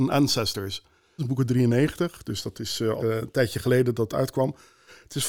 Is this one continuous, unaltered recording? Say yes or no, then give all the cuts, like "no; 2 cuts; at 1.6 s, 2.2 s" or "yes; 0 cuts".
no; 2 cuts; at 1.2 s, 3.0 s